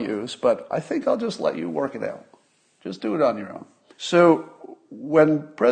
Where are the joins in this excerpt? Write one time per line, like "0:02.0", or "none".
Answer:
0:03.9